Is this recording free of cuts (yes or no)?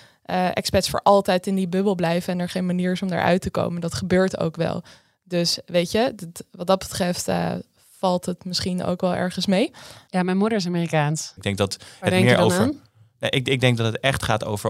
no